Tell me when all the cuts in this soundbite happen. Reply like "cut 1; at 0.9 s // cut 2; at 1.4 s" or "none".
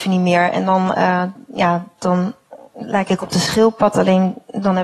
none